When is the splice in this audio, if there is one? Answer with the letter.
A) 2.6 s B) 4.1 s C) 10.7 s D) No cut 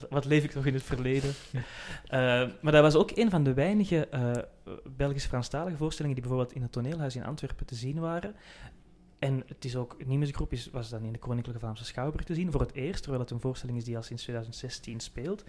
D